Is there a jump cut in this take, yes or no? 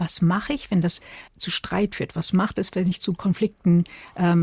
yes